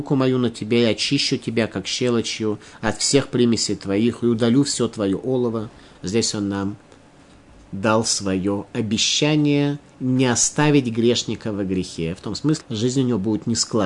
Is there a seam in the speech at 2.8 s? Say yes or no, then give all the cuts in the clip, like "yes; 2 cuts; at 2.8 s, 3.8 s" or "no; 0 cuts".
no; 2 cuts; at 5.9 s, 12.6 s